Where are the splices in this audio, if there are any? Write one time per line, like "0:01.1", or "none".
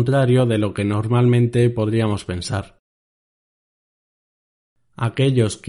none